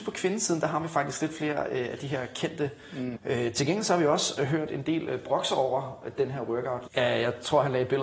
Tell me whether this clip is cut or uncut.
cut